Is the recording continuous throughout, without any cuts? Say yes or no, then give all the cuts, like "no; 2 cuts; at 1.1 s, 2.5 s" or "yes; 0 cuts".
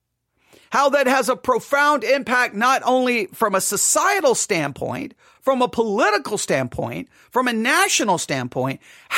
yes; 0 cuts